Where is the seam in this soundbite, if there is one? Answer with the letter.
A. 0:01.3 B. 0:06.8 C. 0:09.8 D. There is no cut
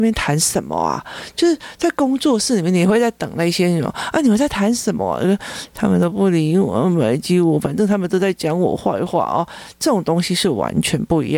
D